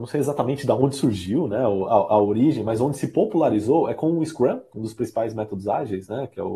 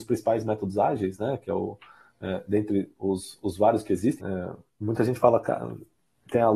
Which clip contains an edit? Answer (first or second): second